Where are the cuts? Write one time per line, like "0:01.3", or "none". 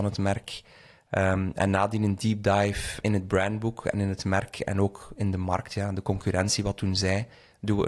0:03.0